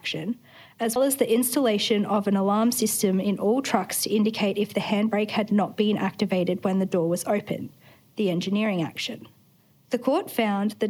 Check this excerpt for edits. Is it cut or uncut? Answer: cut